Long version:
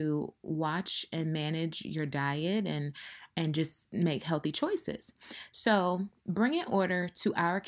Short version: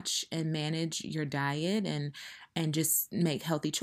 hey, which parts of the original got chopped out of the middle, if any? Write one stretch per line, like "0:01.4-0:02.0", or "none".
none